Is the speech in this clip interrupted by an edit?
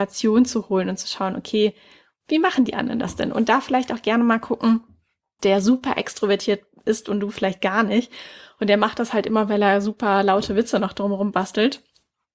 yes; 1 cut; at 5.4 s

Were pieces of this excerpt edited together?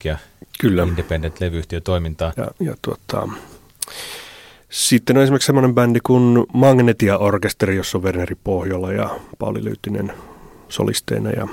yes; 1 cut; at 2.4 s

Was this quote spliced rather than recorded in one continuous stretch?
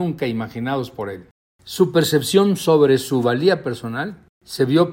no; 0 cuts

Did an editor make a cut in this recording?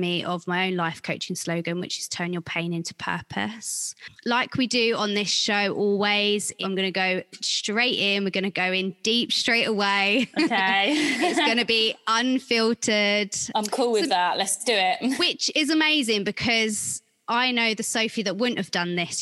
no; 0 cuts

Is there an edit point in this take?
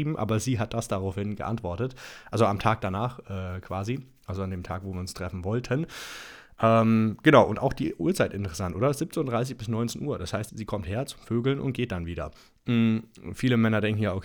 yes; 1 cut; at 10.5 s

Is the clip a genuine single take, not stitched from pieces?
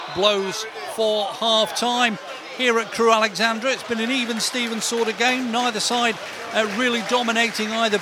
yes; 0 cuts

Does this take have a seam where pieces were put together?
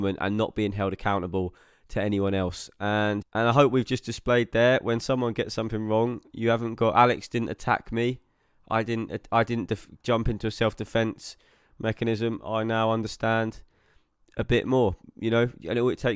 yes; 1 cut; at 3.2 s

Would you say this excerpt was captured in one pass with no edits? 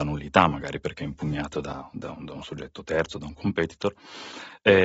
yes; 0 cuts

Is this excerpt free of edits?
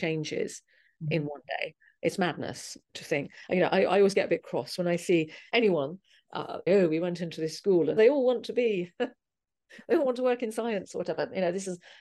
no; 2 cuts; at 6.7 s, 8.0 s

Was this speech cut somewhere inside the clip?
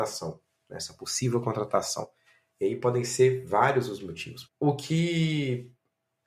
yes; 2 cuts; at 2.5 s, 4.4 s

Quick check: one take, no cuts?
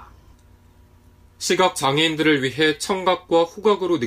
no; 1 cut; at 1.3 s

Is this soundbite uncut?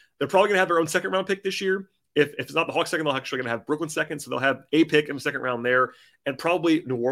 yes; 0 cuts

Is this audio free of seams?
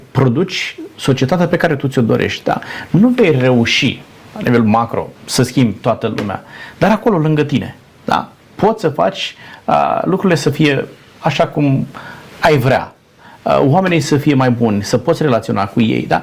no; 1 cut; at 5.2 s

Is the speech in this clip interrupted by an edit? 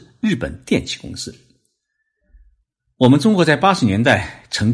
no; 0 cuts

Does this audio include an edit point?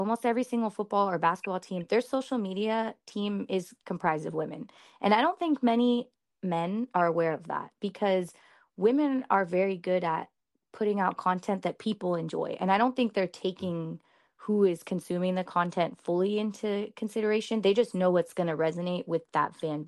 no; 0 cuts

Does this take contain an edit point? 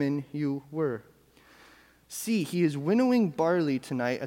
no; 0 cuts

